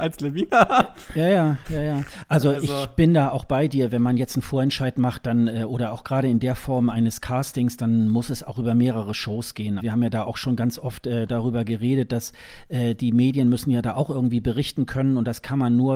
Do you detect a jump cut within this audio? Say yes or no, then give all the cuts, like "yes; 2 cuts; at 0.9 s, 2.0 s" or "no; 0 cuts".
yes; 1 cut; at 9.8 s